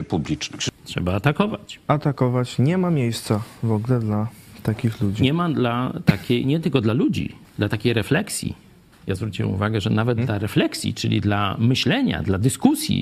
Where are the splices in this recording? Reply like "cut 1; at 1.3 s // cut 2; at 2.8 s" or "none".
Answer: none